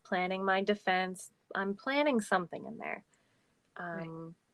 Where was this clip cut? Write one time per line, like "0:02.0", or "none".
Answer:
0:01.4